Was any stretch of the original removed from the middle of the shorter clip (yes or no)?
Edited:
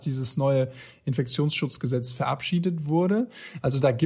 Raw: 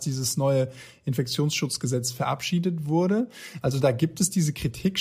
no